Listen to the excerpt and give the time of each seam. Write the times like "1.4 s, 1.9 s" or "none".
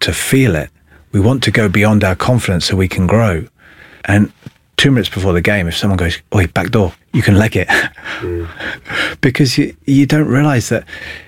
4.0 s, 7.0 s, 8.5 s